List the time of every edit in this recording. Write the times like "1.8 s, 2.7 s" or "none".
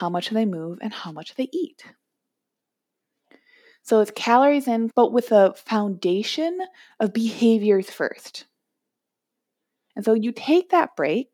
4.9 s, 9.9 s